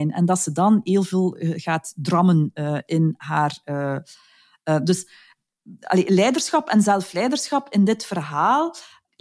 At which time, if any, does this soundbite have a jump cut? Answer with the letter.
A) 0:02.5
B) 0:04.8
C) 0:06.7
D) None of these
D